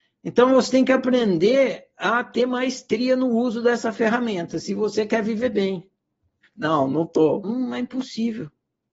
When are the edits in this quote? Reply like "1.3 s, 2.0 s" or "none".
6.4 s, 7.4 s